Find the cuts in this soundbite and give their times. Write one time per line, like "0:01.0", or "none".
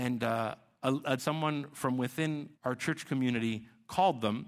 0:01.2
0:02.6